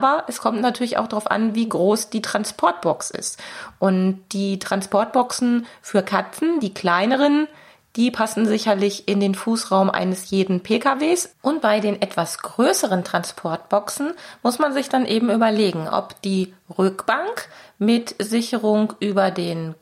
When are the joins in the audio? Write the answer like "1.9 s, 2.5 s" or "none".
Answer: none